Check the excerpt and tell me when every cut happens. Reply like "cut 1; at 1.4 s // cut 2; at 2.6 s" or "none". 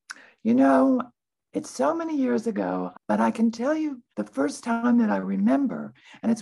cut 1; at 2.9 s // cut 2; at 4.1 s

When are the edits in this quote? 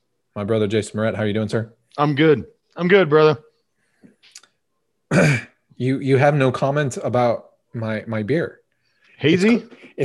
none

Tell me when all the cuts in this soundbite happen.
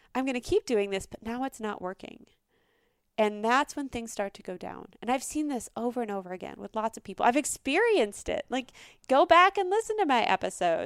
none

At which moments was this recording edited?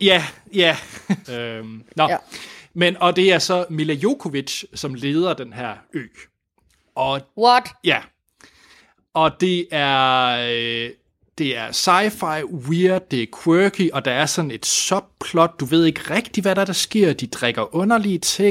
cut 1; at 1.2 s

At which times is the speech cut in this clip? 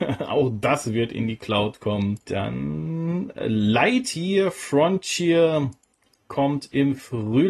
cut 1; at 2.2 s

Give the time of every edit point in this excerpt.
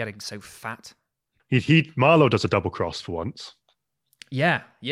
none

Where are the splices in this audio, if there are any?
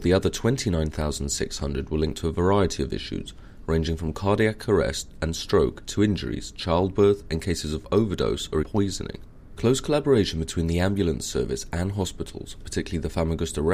cut 1; at 8.6 s

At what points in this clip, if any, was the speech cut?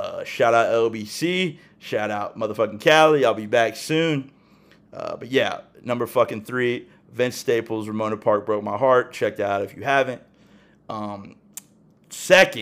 none

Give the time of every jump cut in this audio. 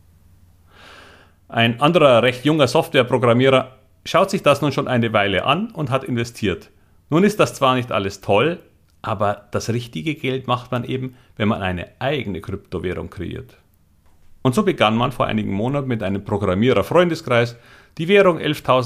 none

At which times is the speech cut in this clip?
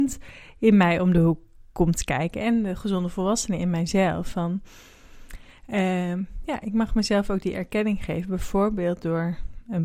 none

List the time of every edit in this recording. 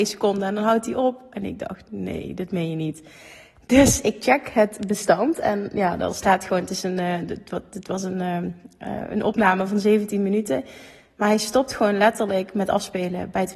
none

